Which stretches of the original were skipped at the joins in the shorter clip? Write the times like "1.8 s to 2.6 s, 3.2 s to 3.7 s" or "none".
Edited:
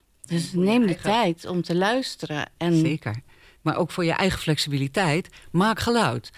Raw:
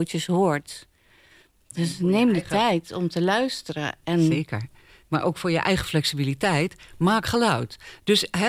none

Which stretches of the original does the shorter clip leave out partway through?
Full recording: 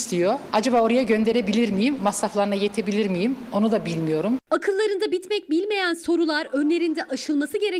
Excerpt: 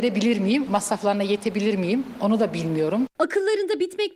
none

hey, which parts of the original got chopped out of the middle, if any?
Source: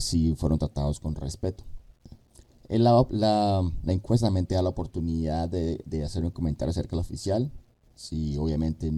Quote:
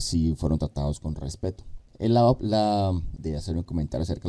1.9 s to 2.6 s, 3.9 s to 5.8 s

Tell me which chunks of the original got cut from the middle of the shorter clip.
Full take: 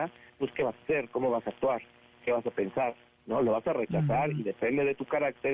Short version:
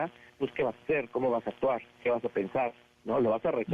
1.9 s to 2.1 s

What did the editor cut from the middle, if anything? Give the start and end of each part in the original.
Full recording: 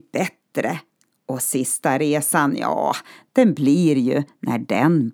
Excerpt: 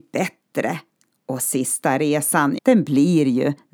2.6 s to 3.3 s

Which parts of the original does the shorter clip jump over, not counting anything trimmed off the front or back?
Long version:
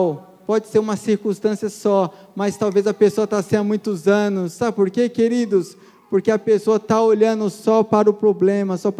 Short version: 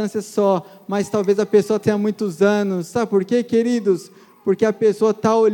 3.3 s to 3.5 s

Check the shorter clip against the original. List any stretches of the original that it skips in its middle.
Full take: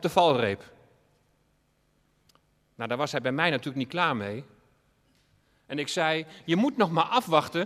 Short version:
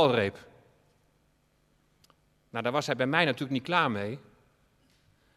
none

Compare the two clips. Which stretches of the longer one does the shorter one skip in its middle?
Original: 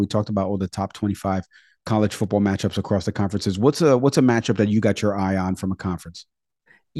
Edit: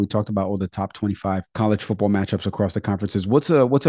1.5 s to 1.8 s

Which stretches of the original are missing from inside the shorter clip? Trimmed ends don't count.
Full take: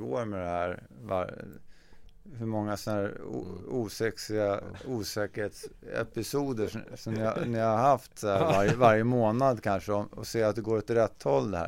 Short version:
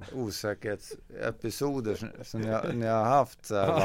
none

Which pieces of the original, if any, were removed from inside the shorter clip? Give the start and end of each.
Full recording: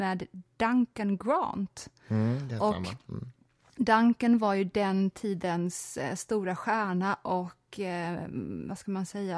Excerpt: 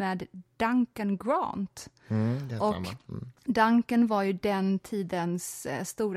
3.4 s to 3.7 s

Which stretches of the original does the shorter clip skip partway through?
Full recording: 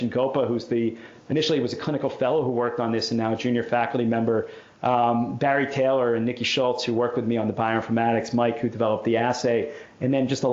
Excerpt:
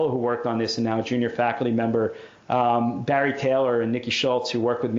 none

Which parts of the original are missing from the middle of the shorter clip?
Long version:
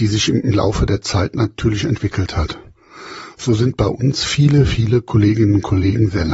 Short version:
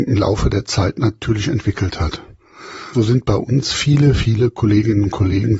3.3 s to 3.5 s

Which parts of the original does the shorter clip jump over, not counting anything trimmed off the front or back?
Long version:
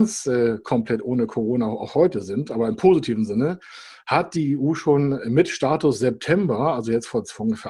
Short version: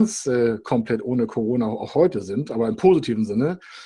none

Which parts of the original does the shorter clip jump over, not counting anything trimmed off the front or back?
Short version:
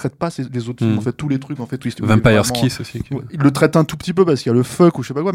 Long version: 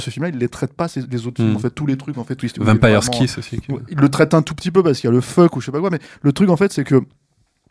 none

